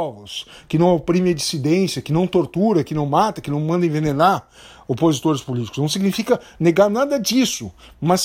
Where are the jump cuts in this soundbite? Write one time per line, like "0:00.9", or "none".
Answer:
none